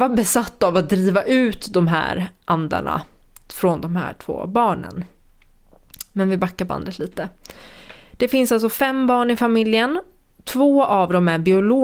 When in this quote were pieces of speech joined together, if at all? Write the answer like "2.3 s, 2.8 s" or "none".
none

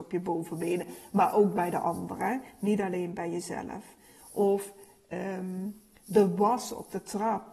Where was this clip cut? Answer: none

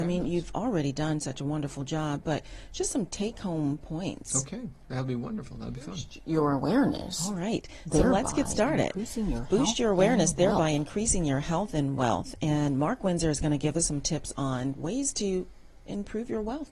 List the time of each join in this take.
none

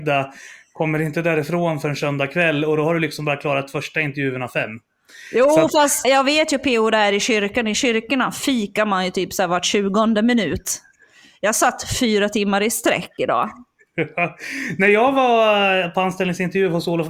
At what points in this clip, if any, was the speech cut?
6.0 s

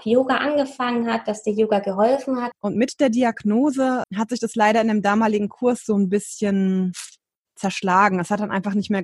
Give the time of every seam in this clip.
2.5 s, 4.0 s

